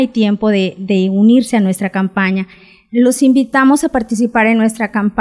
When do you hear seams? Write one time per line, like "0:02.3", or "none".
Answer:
0:02.9